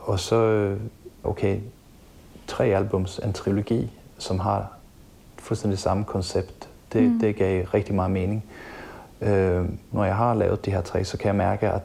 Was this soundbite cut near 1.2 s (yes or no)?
yes